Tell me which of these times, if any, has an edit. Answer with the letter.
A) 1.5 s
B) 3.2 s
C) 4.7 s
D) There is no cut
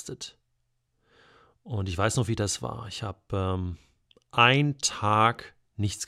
D